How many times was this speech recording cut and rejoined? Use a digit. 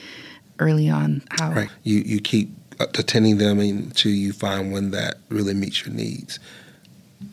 1